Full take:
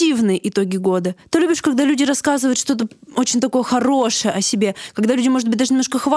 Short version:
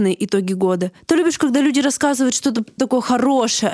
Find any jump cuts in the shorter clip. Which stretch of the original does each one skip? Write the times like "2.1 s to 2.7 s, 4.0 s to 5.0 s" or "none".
3.0 s to 3.4 s